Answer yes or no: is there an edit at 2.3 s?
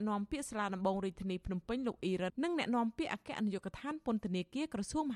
yes